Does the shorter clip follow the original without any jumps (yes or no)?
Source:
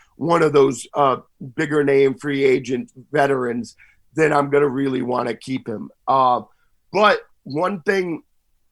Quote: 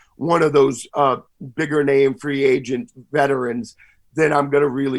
yes